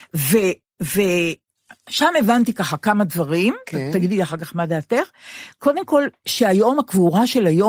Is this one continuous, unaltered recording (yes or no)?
yes